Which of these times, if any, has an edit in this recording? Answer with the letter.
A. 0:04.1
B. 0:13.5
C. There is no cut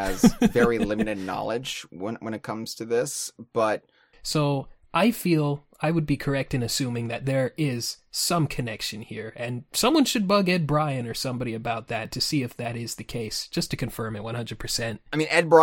A